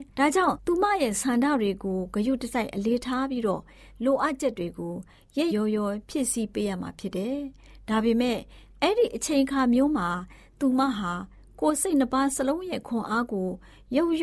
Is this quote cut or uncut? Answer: cut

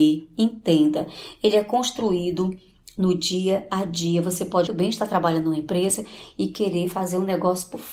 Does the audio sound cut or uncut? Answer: cut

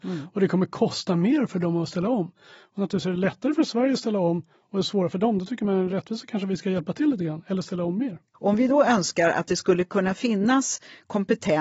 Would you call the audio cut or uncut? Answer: uncut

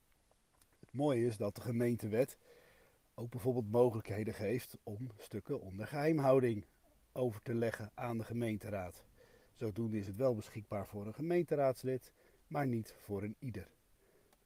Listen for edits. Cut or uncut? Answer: uncut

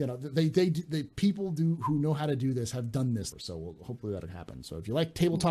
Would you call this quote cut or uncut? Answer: cut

